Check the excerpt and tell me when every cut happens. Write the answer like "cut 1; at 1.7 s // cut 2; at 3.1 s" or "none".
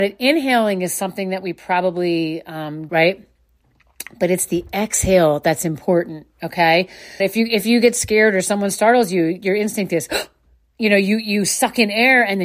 cut 1; at 2.9 s // cut 2; at 7.2 s